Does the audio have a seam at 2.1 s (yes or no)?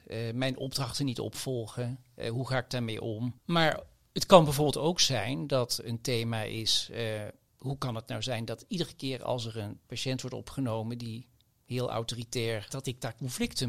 no